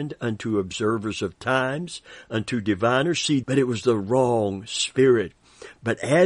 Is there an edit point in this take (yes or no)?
yes